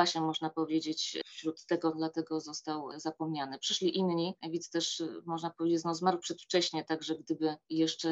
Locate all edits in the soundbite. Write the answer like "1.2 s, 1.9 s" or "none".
1.9 s